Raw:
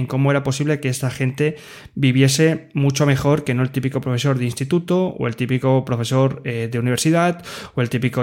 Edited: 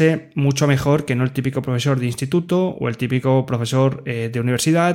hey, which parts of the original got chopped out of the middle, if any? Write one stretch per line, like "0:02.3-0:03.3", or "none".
none